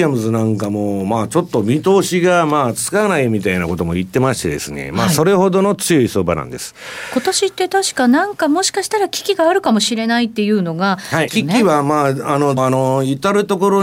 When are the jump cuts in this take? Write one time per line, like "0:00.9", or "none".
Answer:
0:11.3
0:12.6

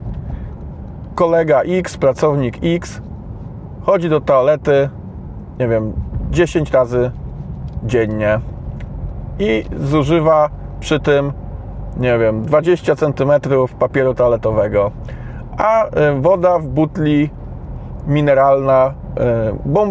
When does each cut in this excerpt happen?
none

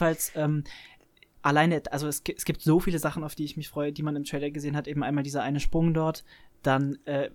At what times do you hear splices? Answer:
none

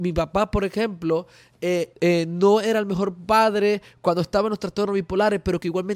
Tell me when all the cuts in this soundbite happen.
0:01.9

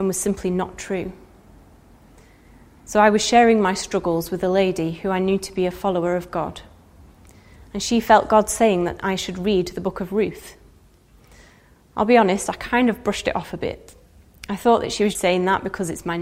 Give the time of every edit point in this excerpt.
0:15.2

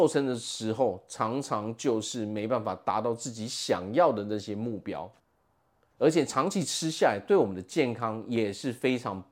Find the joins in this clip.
none

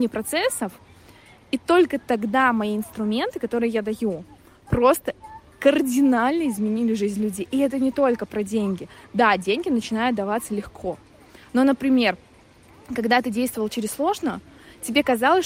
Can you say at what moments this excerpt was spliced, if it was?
none

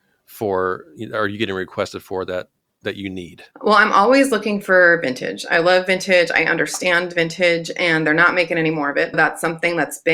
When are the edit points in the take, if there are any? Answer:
0:03.5
0:09.1

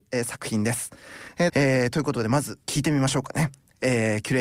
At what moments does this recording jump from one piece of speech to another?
0:01.5
0:02.6

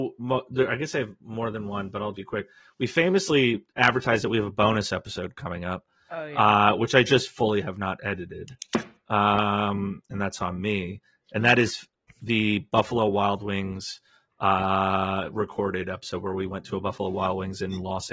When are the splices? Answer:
0:02.1

